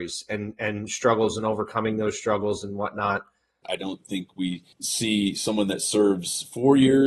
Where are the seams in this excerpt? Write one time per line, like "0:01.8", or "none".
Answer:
0:03.6
0:04.7

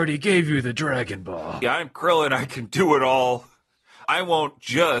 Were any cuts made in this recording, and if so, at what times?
0:01.6
0:04.0

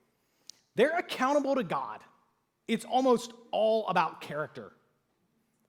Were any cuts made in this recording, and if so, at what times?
0:02.6

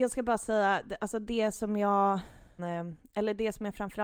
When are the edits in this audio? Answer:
0:02.6

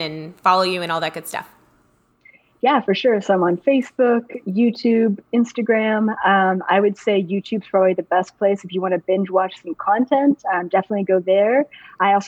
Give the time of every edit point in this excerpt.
none

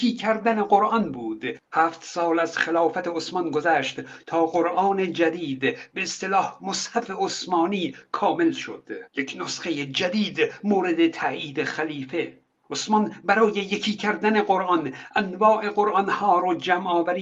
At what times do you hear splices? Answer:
0:09.1

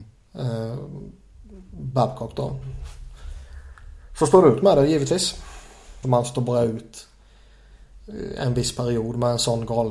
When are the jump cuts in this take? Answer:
0:06.0

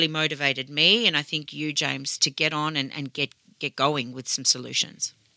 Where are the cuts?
0:02.2

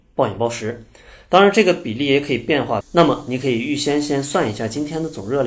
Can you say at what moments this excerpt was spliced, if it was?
0:02.8

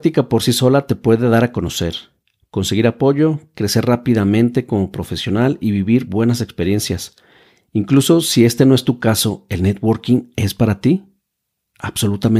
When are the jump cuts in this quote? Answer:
none

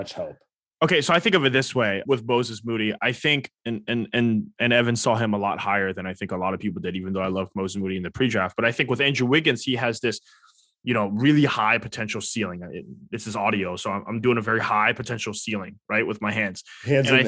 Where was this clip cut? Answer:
0:02.1
0:03.6

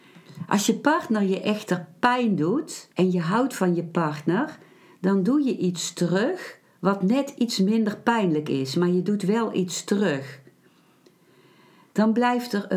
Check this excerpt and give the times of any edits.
0:02.9

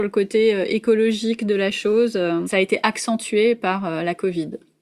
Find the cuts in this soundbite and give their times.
none

